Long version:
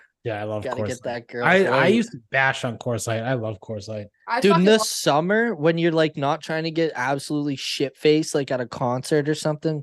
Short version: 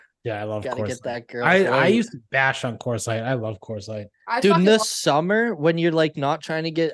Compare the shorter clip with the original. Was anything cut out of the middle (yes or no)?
no